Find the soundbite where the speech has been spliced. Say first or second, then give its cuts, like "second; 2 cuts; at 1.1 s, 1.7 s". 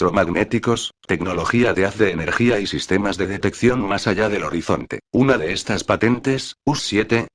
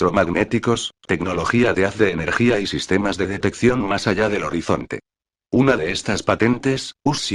first; 1 cut; at 5.1 s